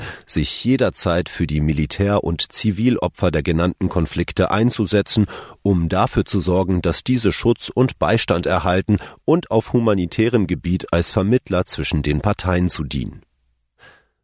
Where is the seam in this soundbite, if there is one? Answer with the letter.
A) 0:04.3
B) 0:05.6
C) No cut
C